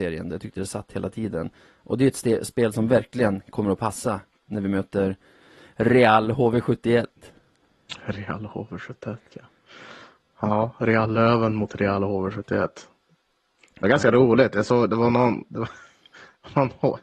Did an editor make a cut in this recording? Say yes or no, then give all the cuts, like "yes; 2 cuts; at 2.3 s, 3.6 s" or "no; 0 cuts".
no; 0 cuts